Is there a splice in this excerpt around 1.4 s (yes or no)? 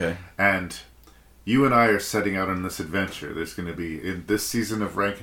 no